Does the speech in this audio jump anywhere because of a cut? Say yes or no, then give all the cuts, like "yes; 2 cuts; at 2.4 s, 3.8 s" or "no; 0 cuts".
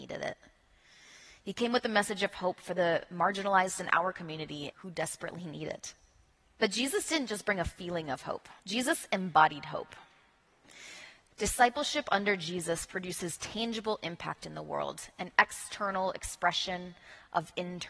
yes; 3 cuts; at 4.7 s, 8.6 s, 11.3 s